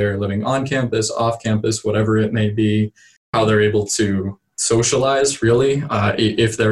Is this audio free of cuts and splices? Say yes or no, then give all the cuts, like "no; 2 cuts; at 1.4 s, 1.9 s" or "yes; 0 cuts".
yes; 0 cuts